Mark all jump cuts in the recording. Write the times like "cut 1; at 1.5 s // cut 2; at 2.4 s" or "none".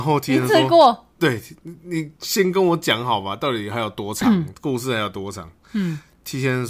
none